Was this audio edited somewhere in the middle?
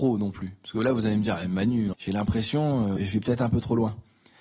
yes; 2 cuts; at 1.9 s, 3.0 s

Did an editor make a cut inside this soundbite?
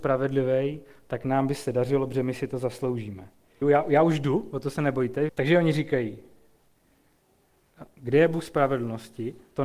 yes; 2 cuts; at 3.6 s, 5.3 s

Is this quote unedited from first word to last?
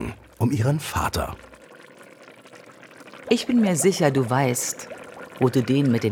no; 1 cut; at 3.2 s

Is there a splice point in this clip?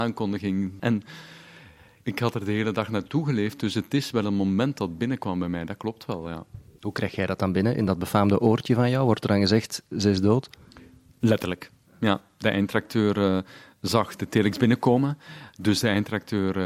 no; 0 cuts

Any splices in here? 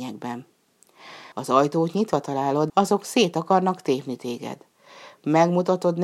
yes; 2 cuts; at 1.3 s, 2.7 s

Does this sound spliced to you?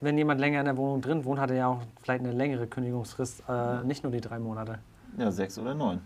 no; 0 cuts

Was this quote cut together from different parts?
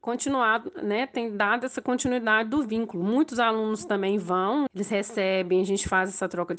yes; 1 cut; at 4.7 s

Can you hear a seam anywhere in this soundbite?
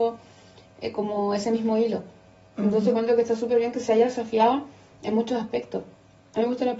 no; 0 cuts

